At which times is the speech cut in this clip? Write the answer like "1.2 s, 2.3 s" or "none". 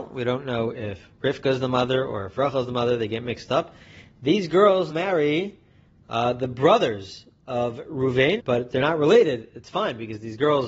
4.9 s, 8.4 s